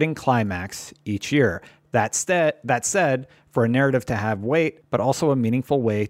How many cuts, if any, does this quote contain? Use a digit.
1